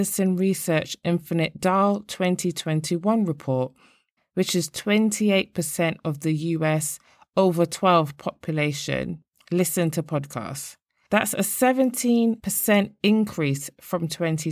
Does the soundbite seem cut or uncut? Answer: cut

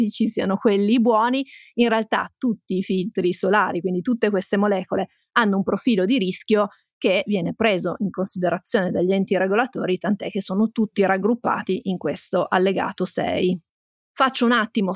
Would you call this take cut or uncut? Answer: uncut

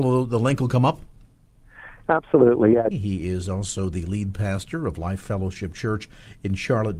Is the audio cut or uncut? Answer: cut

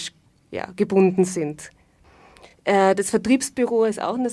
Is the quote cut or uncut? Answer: uncut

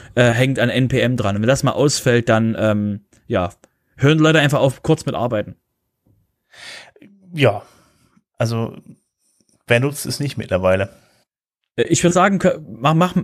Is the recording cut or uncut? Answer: uncut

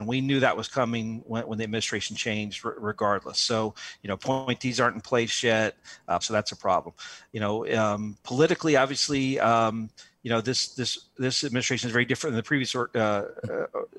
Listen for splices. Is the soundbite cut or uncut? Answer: cut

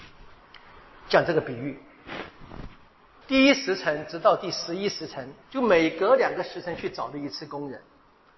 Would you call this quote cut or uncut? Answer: cut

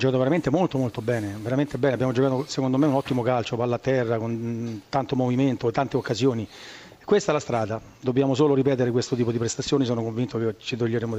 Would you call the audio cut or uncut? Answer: uncut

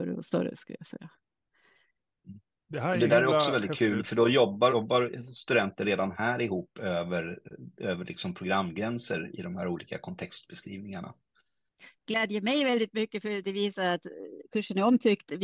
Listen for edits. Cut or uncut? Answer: cut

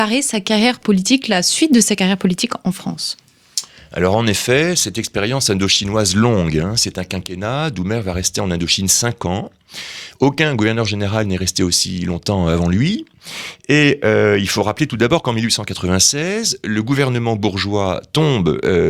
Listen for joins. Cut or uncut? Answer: uncut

